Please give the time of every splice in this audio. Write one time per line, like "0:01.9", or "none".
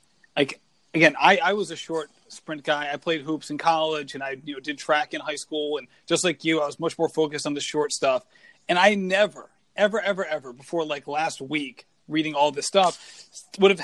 none